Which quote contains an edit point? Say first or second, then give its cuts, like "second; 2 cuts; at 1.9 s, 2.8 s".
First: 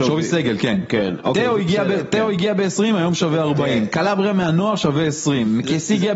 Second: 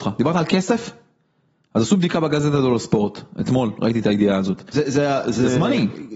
second; 1 cut; at 4.7 s